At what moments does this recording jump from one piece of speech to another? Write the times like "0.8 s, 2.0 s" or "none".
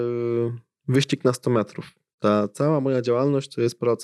none